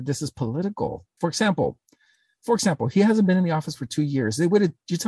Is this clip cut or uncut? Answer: cut